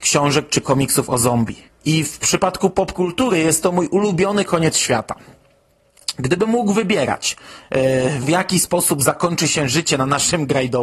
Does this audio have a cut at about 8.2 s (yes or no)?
yes